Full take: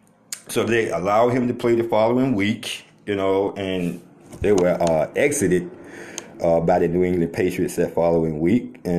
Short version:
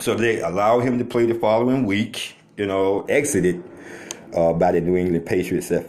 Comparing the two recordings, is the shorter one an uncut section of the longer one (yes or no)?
no